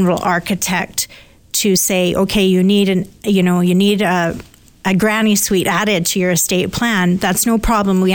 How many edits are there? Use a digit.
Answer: 0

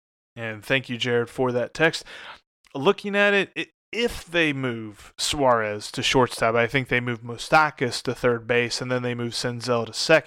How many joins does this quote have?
0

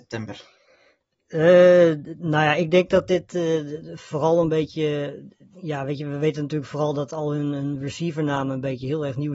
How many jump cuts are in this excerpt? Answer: 0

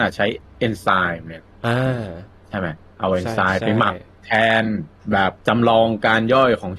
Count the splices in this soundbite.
1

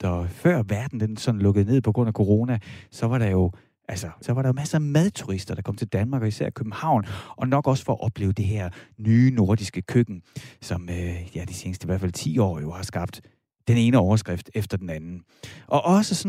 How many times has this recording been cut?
1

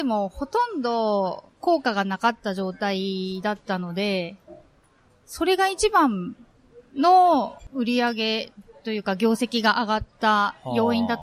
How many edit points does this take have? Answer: 0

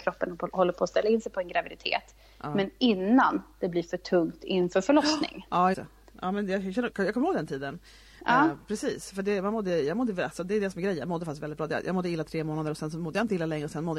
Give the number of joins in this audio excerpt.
1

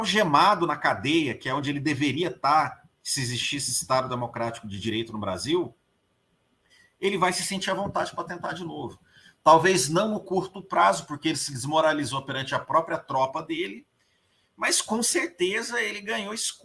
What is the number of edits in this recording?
1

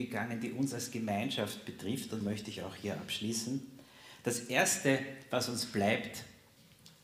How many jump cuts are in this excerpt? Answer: 1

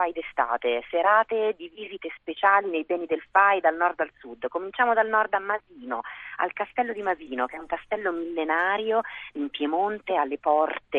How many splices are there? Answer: 1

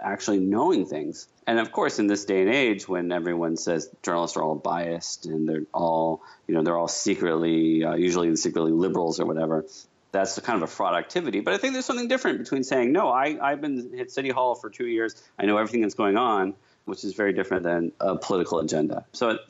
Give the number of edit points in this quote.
0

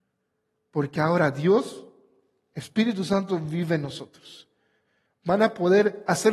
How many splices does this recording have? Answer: 1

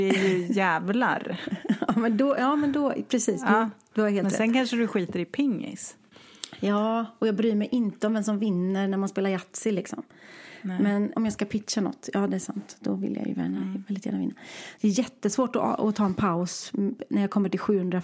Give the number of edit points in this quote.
2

